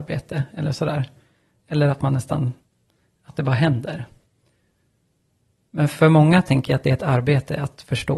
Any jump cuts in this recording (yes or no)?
no